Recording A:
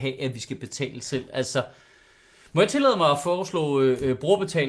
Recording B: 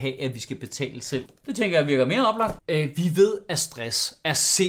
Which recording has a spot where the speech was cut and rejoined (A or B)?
B